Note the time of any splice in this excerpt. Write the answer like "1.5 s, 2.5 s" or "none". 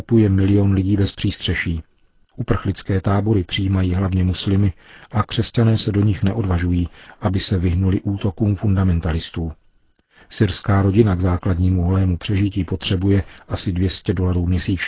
none